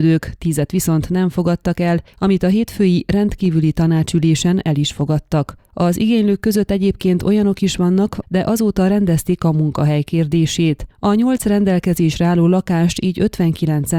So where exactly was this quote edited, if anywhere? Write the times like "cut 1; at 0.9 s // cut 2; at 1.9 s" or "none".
cut 1; at 2.1 s // cut 2; at 8.2 s